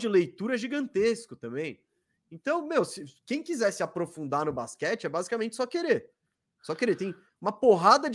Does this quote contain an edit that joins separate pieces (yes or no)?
no